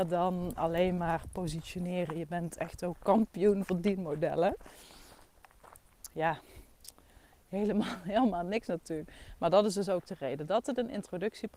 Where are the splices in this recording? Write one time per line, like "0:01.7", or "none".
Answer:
0:06.1